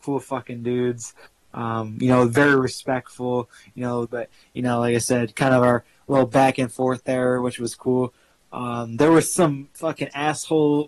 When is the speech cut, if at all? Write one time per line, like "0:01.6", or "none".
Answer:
0:04.1